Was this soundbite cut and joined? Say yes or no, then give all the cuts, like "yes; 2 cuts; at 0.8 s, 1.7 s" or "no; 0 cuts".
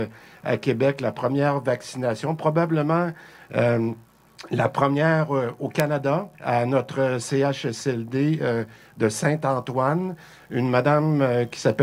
yes; 1 cut; at 6.3 s